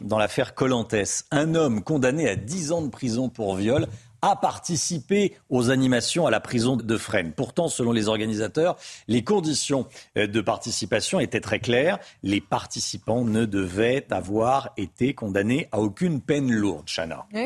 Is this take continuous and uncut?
no; 1 cut; at 6.8 s

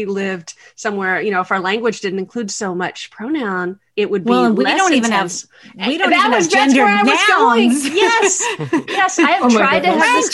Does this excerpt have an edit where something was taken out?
yes; 1 cut; at 3.9 s

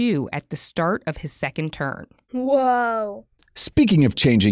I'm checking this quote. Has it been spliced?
no; 0 cuts

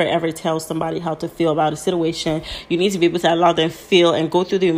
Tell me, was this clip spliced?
no; 0 cuts

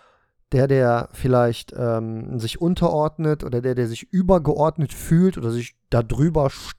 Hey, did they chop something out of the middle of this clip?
no; 0 cuts

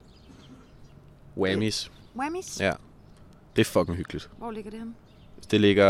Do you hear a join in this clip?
no; 0 cuts

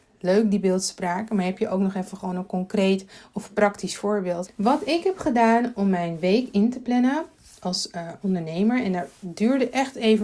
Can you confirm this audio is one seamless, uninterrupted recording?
no; 1 cut; at 4.5 s

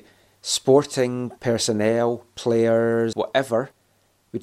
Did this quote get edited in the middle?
yes; 1 cut; at 3.1 s

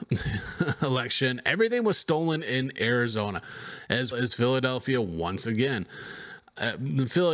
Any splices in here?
yes; 1 cut; at 4.1 s

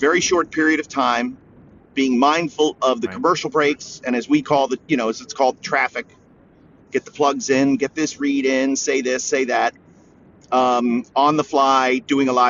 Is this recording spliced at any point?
no; 0 cuts

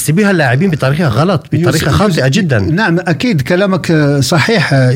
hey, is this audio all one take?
yes; 0 cuts

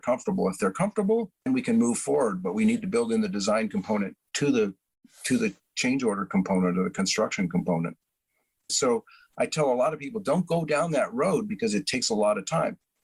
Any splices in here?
yes; 2 cuts; at 1.5 s, 8.7 s

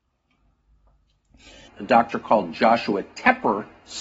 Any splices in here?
yes; 1 cut; at 1.7 s

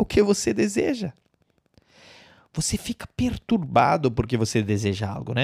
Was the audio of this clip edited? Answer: no; 0 cuts

